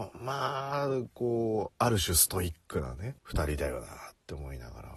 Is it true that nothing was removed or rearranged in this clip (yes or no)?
no